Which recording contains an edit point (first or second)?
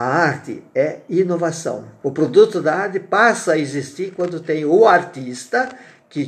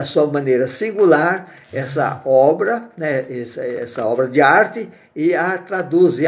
first